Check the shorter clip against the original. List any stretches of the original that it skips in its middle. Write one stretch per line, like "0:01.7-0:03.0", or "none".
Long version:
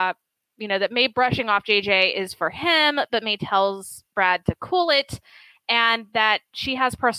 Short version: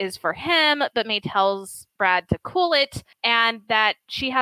0:05.3-0:05.6